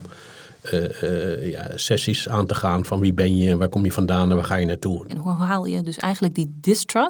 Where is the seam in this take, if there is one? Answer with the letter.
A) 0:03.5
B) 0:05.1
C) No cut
B